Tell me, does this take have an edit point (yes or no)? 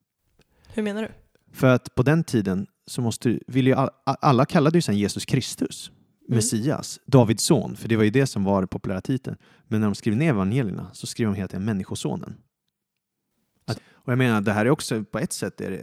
yes